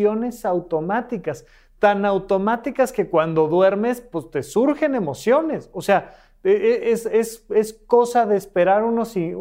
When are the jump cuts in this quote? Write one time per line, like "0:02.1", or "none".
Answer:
none